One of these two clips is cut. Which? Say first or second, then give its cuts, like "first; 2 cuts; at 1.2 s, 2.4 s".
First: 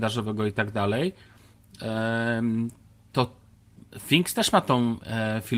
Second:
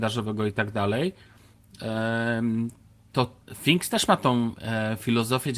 second; 1 cut; at 3.4 s